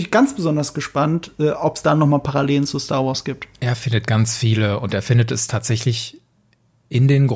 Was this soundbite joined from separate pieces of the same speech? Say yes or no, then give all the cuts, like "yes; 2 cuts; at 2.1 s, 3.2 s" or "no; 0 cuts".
no; 0 cuts